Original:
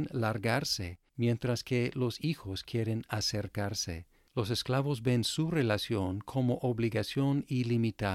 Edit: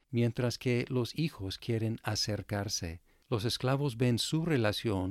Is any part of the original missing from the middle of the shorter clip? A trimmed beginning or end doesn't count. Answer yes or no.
no